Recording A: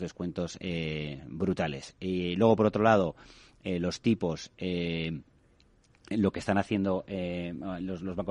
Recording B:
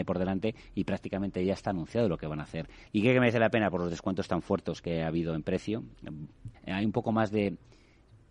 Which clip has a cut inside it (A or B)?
B